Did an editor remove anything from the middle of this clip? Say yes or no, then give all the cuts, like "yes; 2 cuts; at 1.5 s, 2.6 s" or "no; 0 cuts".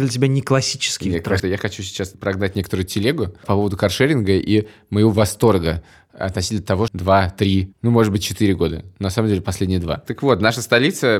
yes; 2 cuts; at 1.4 s, 6.9 s